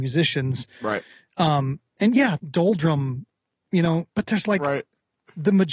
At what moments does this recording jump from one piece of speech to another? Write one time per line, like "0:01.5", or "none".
0:02.4
0:04.1